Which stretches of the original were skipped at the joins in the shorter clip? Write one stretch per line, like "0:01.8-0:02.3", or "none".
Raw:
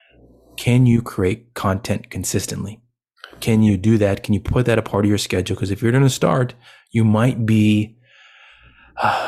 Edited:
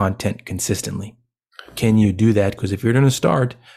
0:04.2-0:05.6